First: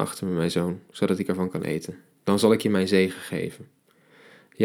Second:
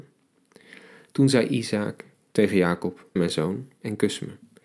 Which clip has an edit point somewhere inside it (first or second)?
second